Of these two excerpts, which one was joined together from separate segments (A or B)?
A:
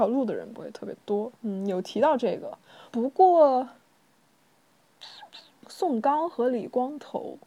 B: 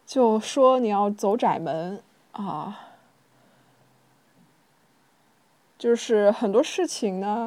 A